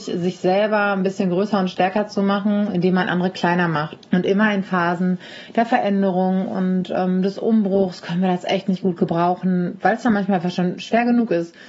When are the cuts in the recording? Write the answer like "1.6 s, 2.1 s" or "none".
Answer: 4.0 s